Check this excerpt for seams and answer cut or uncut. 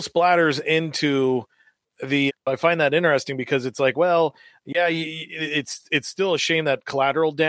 cut